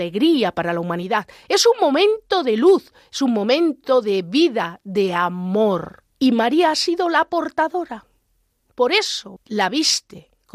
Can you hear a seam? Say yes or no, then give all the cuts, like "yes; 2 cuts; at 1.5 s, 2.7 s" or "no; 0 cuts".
yes; 2 cuts; at 6.1 s, 9.4 s